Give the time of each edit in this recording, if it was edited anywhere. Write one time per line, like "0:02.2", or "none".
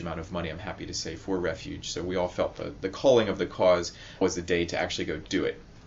0:02.8
0:04.2